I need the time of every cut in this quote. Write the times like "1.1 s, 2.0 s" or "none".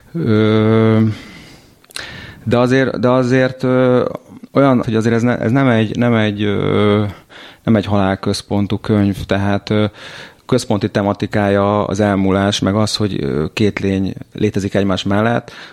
4.8 s